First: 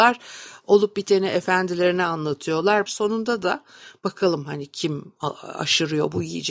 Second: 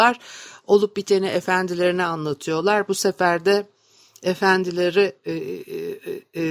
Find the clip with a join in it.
first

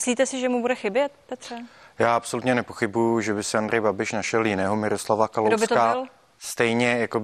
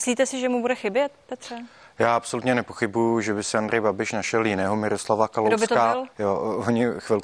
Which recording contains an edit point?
second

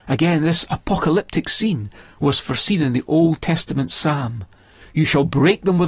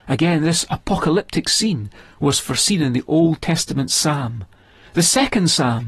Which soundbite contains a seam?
first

